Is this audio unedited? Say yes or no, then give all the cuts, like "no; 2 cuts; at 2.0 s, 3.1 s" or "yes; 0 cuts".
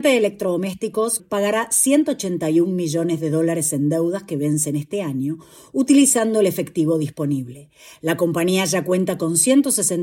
no; 1 cut; at 1.2 s